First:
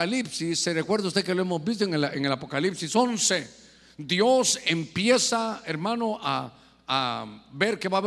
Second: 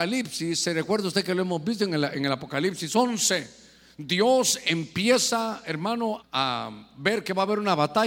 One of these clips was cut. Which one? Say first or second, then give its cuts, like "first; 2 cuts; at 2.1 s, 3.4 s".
second; 1 cut; at 6.2 s